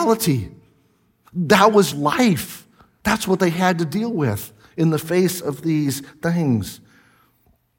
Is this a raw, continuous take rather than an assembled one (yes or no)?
no